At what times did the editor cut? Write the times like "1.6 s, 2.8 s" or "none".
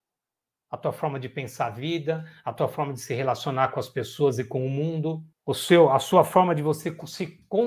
5.3 s